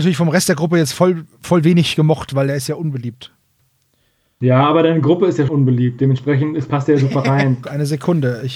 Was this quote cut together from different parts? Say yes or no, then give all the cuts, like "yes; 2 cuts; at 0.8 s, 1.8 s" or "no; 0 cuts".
yes; 2 cuts; at 5.5 s, 7.6 s